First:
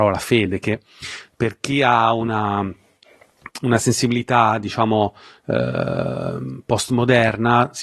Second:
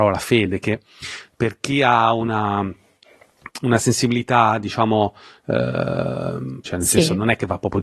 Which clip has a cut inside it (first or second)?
second